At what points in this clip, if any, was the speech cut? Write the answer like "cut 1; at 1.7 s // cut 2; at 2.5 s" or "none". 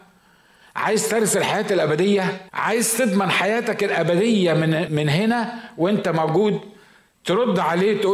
cut 1; at 2.5 s // cut 2; at 4.9 s